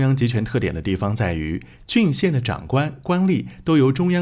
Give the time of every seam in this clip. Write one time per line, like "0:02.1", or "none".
none